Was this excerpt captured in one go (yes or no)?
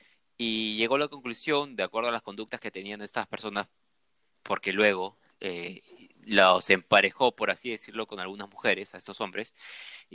yes